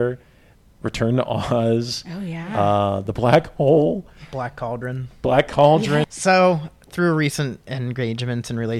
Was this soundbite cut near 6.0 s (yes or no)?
yes